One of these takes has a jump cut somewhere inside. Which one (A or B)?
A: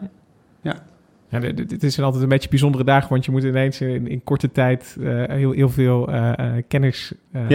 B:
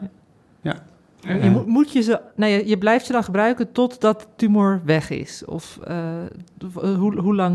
B